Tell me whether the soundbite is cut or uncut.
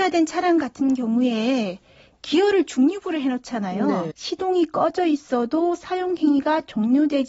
cut